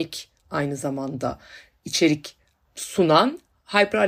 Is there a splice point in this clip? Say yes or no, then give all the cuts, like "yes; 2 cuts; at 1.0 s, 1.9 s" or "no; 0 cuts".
no; 0 cuts